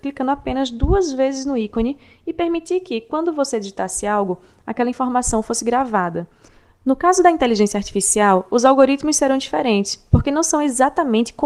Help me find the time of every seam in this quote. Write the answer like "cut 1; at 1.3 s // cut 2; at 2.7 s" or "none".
none